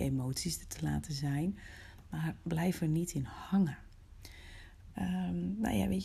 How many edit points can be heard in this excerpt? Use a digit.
1